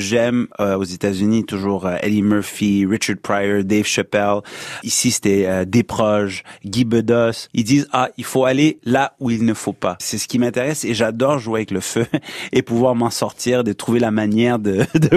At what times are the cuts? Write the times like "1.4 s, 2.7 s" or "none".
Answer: none